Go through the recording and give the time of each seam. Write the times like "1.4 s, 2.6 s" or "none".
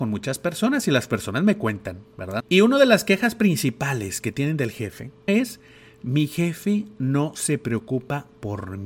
2.4 s, 5.3 s